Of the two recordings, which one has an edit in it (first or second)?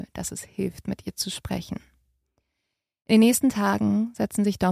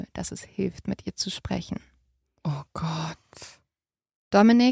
second